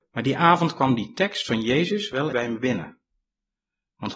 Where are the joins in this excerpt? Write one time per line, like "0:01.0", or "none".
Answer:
0:02.3